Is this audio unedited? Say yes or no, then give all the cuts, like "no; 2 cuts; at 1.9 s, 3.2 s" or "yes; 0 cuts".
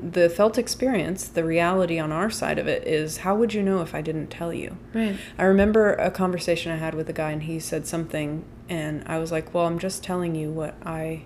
yes; 0 cuts